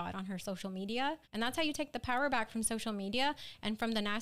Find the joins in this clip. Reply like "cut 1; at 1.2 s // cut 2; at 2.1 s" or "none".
cut 1; at 1.2 s